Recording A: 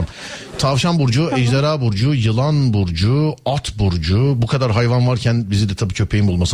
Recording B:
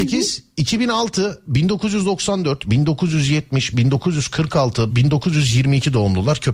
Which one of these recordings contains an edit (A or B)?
B